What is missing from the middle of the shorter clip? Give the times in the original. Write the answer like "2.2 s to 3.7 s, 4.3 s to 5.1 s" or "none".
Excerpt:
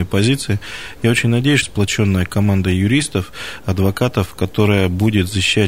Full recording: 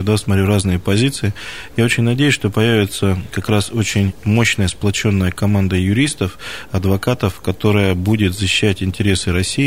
2.4 s to 4.7 s